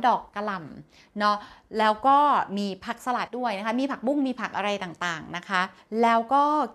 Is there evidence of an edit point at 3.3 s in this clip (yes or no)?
yes